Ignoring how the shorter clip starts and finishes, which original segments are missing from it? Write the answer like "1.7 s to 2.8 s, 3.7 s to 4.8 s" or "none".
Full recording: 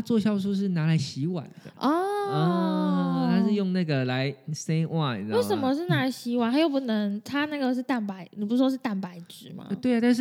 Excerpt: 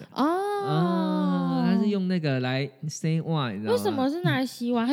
none